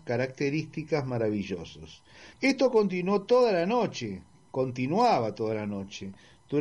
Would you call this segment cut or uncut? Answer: cut